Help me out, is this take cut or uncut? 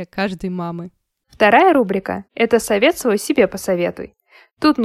uncut